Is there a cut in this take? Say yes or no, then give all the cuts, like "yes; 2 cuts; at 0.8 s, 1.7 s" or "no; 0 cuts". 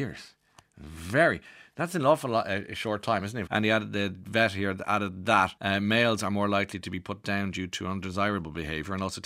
yes; 2 cuts; at 3.5 s, 5.6 s